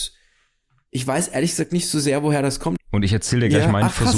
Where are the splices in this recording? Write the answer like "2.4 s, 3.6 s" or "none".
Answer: 2.8 s